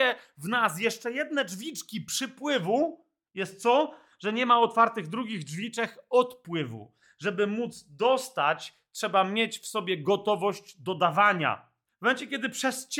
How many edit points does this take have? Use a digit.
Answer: 1